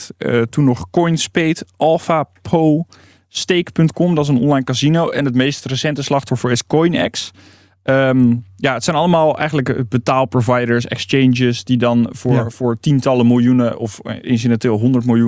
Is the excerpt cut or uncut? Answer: uncut